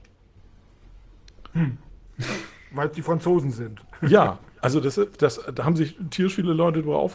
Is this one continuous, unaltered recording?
yes; 0 cuts

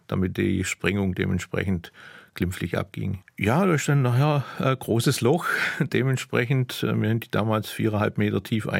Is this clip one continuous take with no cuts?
no; 1 cut; at 3.2 s

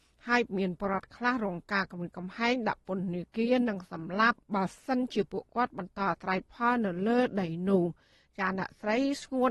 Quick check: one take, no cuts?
no; 1 cut; at 4.4 s

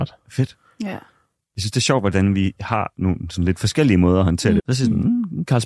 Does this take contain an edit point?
yes; 1 cut; at 4.6 s

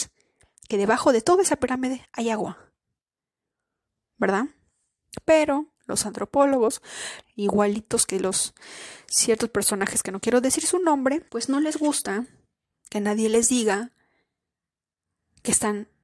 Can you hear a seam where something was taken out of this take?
yes; 2 cuts; at 7.2 s, 11.3 s

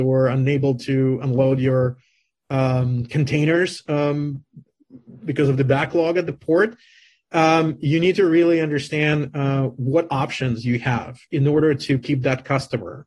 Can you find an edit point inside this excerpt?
no; 0 cuts

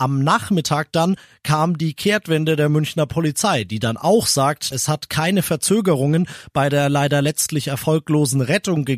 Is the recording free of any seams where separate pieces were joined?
no; 1 cut; at 4.7 s

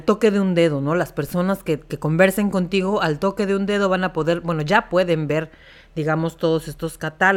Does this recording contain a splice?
no; 0 cuts

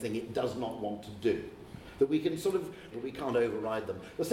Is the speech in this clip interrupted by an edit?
yes; 1 cut; at 2.9 s

